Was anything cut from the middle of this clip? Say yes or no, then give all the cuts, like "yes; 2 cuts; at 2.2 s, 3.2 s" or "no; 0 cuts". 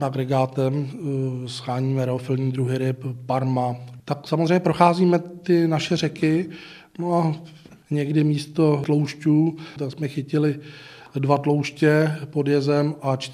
yes; 2 cuts; at 4.0 s, 9.8 s